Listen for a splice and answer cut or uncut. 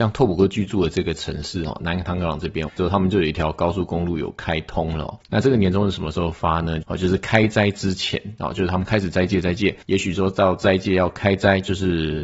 cut